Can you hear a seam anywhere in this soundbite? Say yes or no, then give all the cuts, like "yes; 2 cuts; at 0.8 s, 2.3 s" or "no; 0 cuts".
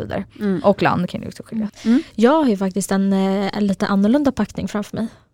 yes; 1 cut; at 1.7 s